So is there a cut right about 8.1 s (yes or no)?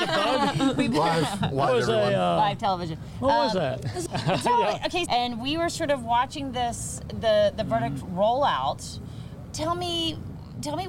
no